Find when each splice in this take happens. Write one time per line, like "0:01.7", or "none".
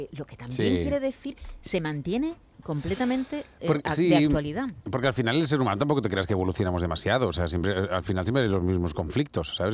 none